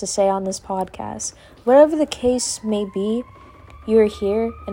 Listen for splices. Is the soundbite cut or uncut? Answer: uncut